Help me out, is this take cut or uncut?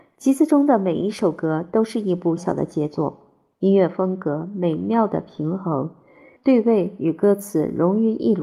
cut